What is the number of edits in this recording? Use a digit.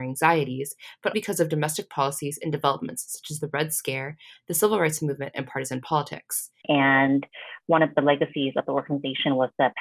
2